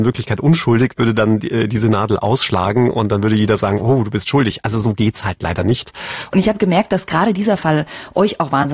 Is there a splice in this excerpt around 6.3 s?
yes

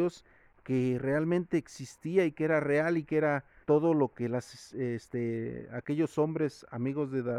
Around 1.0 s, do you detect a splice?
no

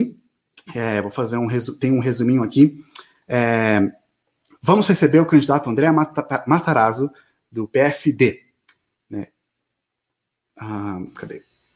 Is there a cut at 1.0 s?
no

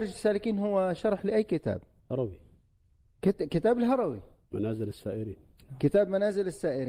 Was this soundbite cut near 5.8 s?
no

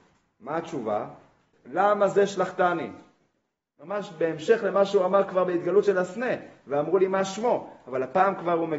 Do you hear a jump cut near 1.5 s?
yes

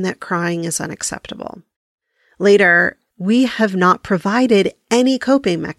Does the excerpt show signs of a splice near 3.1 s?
yes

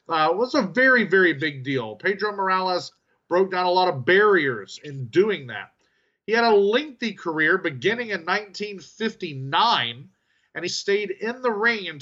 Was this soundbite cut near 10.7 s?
yes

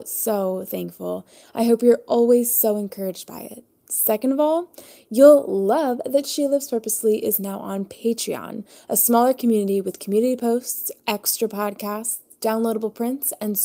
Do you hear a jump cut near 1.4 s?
yes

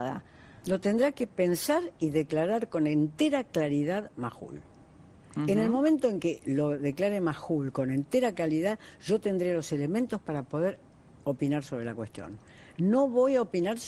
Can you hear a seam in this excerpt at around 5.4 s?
no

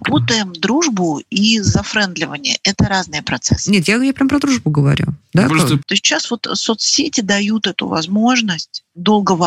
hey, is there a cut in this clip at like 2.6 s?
no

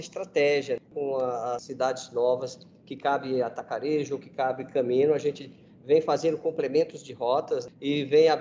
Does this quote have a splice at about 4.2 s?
yes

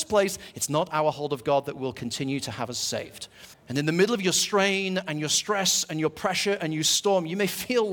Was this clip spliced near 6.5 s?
no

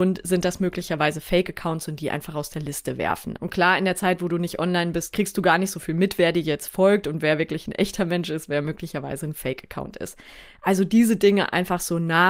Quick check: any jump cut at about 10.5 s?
no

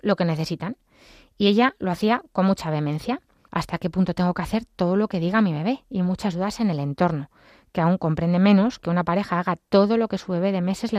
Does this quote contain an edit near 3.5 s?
yes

